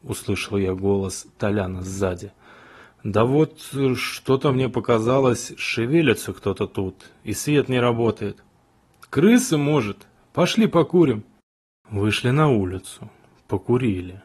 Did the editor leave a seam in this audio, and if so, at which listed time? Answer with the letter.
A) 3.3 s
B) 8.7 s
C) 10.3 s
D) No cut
D